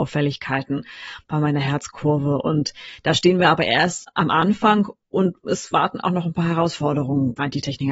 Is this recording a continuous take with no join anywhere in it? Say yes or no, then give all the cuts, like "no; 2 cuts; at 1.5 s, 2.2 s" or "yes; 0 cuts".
yes; 0 cuts